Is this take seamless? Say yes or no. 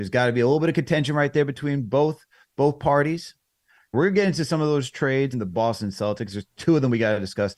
no